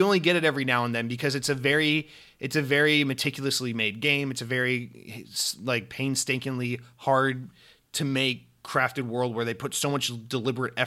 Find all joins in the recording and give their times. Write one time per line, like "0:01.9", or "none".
none